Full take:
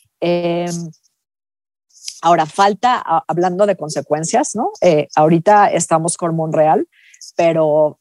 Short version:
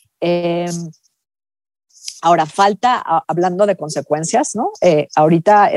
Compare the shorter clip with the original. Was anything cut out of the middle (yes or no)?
no